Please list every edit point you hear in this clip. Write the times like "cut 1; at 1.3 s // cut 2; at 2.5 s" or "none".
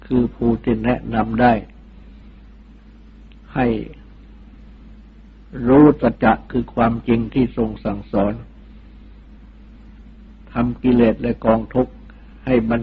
cut 1; at 6.1 s